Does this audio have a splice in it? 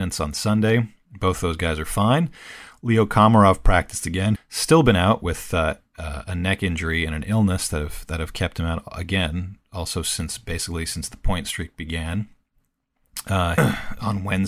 yes; 2 cuts; at 4.4 s, 13.6 s

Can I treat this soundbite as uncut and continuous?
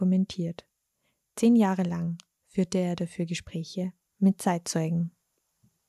yes; 0 cuts

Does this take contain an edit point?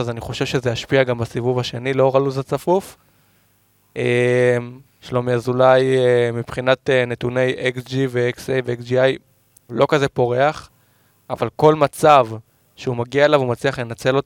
yes; 2 cuts; at 4.9 s, 9.7 s

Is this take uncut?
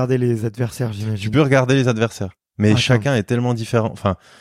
yes; 0 cuts

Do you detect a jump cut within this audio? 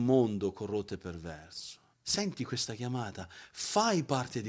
yes; 1 cut; at 1.9 s

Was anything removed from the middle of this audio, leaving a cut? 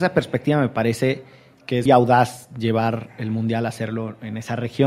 yes; 1 cut; at 1.9 s

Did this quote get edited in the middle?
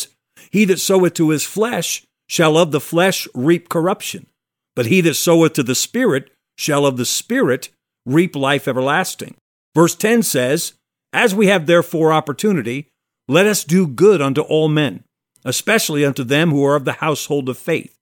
no; 0 cuts

